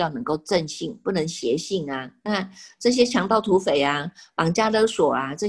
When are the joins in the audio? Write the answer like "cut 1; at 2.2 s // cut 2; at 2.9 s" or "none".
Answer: cut 1; at 2.3 s